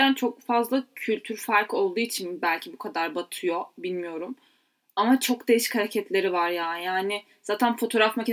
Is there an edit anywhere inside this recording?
no; 0 cuts

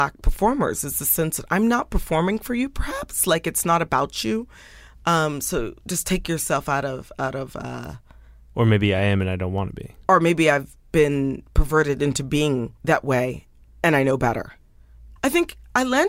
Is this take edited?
yes; 3 cuts; at 10.1 s, 12.8 s, 15.2 s

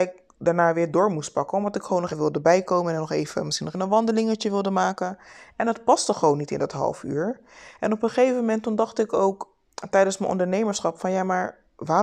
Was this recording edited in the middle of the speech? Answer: yes; 2 cuts; at 2.1 s, 3.7 s

